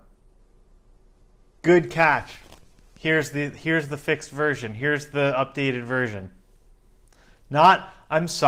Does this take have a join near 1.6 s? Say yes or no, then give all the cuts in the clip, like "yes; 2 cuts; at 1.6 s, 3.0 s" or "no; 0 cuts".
yes; 1 cut; at 1.6 s